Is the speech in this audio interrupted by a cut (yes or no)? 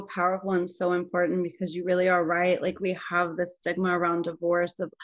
no